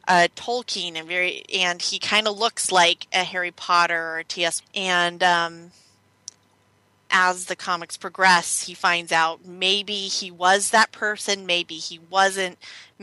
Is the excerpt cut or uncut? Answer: cut